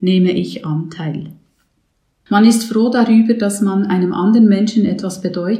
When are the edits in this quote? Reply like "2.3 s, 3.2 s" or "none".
2.3 s